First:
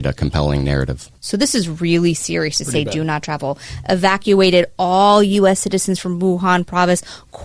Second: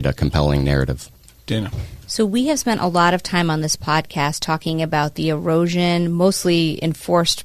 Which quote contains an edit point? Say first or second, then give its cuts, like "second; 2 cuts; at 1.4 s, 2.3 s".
first; 1 cut; at 1.2 s